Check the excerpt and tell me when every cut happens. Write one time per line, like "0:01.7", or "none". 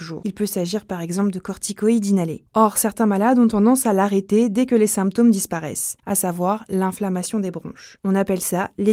0:06.0
0:08.0